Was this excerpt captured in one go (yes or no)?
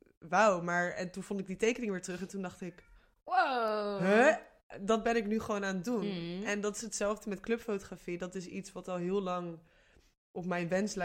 yes